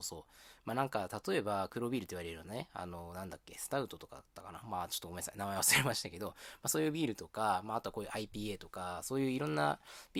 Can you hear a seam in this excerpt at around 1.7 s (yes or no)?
yes